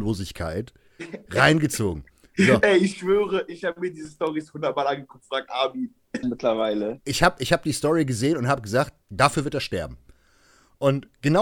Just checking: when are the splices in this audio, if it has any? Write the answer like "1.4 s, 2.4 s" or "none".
6.2 s, 9.0 s